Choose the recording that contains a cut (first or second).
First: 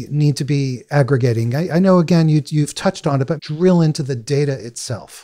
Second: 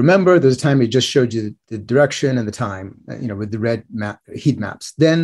first